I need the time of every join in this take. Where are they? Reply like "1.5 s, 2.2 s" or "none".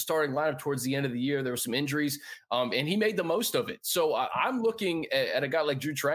none